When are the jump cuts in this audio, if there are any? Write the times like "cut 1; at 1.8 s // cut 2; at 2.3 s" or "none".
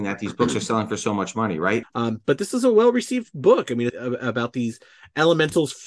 cut 1; at 1.8 s // cut 2; at 3.9 s